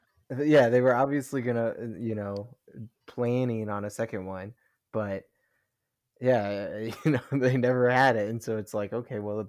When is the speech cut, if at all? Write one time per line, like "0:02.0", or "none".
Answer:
0:03.0